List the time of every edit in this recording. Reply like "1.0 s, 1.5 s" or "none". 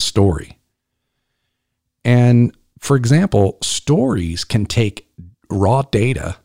none